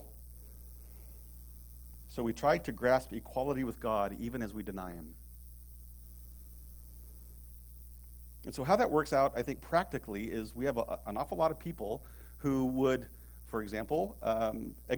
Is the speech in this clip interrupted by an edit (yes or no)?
no